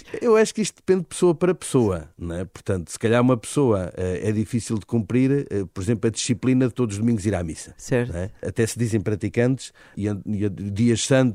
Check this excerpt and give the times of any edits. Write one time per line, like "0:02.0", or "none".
0:08.4
0:09.9